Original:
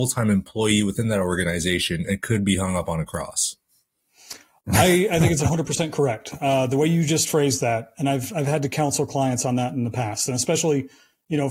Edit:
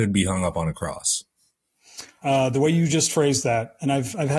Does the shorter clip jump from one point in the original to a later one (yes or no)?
yes